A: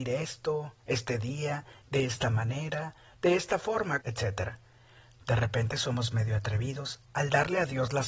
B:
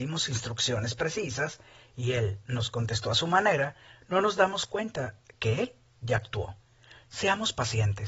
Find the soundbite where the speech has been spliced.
A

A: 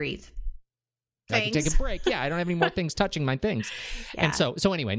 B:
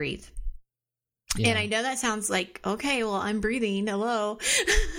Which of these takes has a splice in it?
A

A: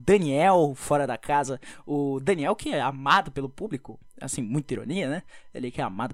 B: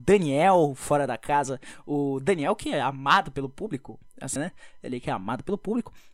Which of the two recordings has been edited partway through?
B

